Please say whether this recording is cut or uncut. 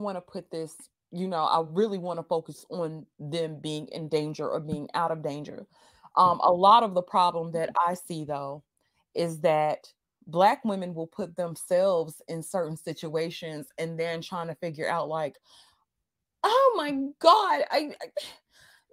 uncut